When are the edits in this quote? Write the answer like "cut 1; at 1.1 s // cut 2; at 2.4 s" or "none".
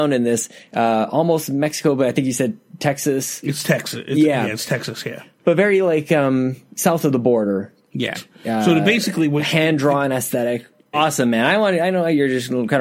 cut 1; at 8.1 s // cut 2; at 10.9 s